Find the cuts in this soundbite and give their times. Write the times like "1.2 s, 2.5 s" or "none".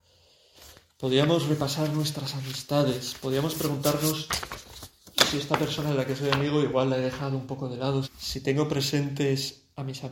8.0 s